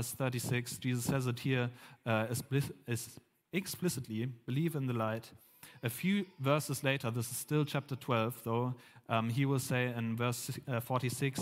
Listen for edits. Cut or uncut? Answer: uncut